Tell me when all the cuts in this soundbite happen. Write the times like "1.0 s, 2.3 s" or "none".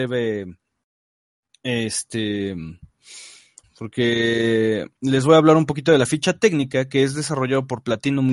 3.6 s, 5.0 s